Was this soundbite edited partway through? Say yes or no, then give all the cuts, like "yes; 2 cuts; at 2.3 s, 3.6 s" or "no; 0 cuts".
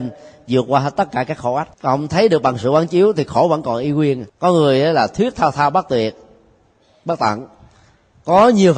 yes; 2 cuts; at 1.7 s, 4.3 s